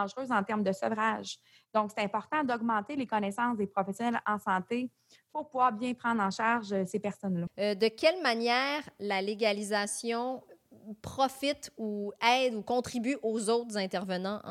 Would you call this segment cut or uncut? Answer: cut